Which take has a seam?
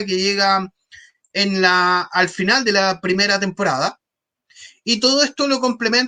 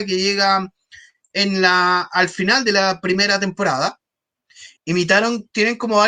second; 1 cut; at 4.8 s

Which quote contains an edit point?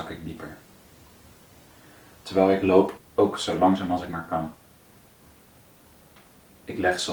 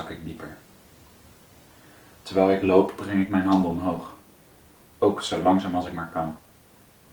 first; 1 cut; at 3.0 s

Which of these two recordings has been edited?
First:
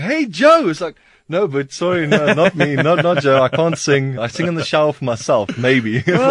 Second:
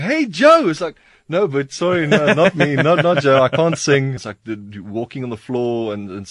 second; 1 cut; at 4.2 s

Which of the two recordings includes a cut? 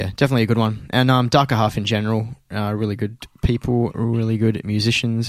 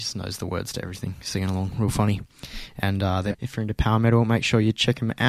second; 1 cut; at 3.3 s

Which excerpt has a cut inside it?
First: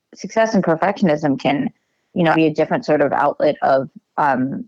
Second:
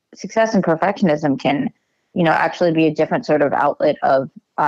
first; 1 cut; at 2.3 s

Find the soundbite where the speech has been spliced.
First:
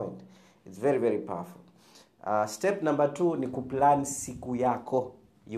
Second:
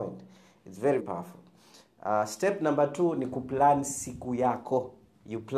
second; 1 cut; at 1.0 s

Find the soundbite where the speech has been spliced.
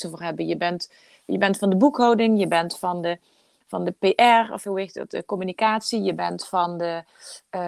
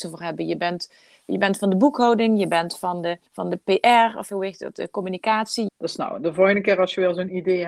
second; 2 cuts; at 3.3 s, 5.7 s

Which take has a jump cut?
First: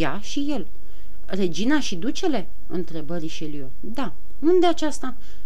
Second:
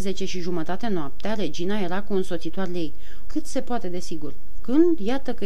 second; 2 cuts; at 3.3 s, 4.6 s

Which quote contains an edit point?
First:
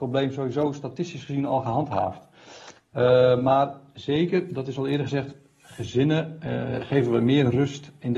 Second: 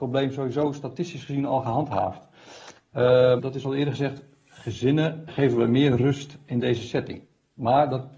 second; 2 cuts; at 3.4 s, 5.3 s

